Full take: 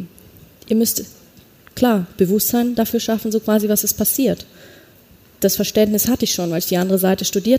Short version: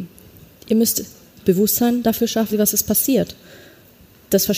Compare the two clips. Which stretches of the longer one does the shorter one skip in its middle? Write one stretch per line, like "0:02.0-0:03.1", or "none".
0:01.4-0:02.1
0:03.2-0:03.6